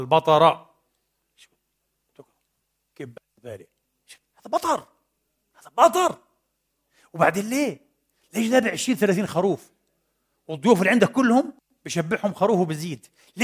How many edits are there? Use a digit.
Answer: 0